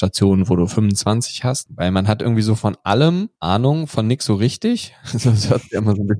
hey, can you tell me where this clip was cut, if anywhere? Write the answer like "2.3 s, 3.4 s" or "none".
1.7 s, 3.3 s

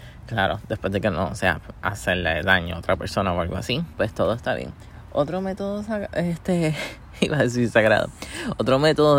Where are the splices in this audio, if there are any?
3.9 s

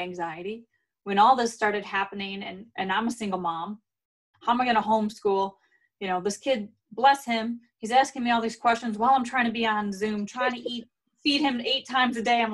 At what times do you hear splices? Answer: 4.3 s

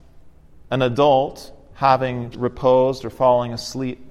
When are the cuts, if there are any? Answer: 2.3 s

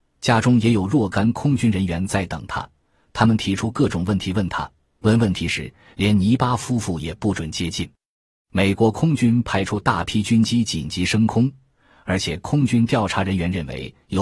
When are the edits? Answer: none

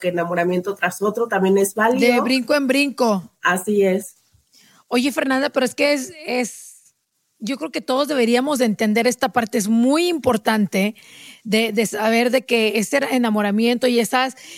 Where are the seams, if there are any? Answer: none

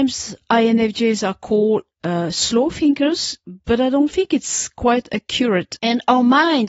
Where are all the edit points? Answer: 5.8 s

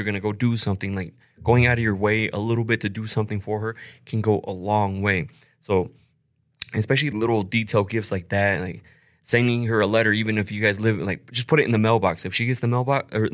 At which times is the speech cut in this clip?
7.1 s

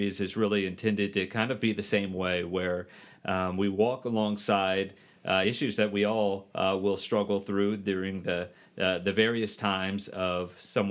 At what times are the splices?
none

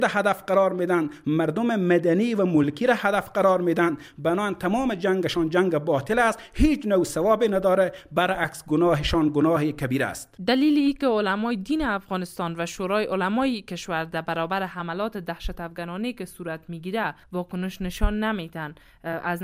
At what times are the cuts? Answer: 10.4 s, 17.2 s

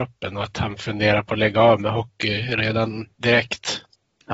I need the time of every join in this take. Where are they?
3.1 s

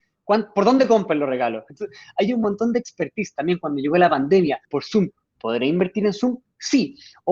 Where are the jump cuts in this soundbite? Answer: 1.7 s, 4.6 s

